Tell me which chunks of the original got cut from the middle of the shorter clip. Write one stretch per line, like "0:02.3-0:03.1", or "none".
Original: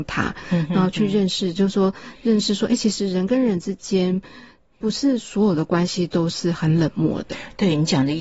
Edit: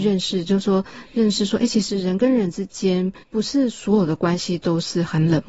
0:04.3-0:04.7